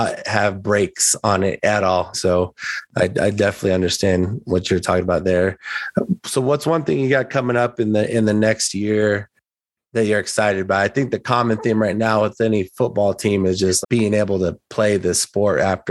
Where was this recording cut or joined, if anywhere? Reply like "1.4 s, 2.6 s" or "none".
2.1 s, 13.8 s